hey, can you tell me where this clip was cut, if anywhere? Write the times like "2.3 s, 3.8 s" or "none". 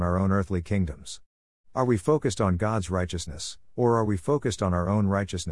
3.7 s